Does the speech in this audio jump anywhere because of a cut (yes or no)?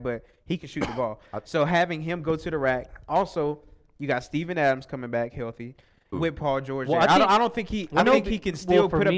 yes